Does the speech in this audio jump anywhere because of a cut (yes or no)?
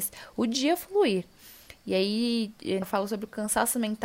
yes